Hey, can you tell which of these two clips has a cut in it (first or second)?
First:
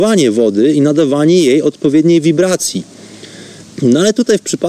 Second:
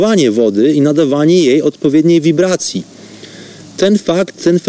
first